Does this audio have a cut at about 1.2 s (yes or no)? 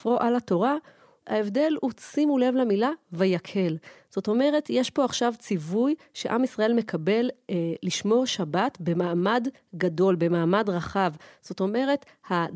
yes